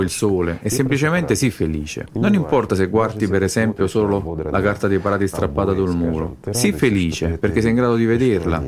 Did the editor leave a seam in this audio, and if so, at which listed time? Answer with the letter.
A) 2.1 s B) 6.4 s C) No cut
A